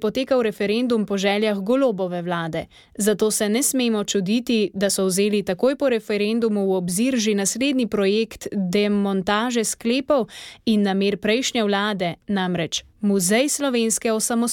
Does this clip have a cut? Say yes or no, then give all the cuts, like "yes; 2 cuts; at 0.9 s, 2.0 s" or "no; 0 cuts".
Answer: no; 0 cuts